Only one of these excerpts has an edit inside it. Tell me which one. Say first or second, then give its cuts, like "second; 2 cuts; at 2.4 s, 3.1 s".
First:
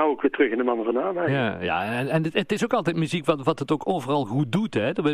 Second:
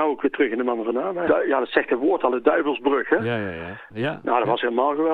second; 2 cuts; at 1.3 s, 3.9 s